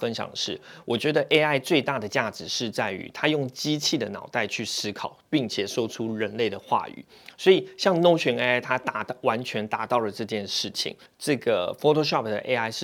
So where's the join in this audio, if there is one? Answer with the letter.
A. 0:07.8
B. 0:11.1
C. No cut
B